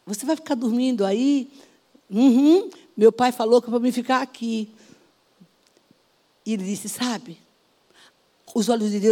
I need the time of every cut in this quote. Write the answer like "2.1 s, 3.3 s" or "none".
none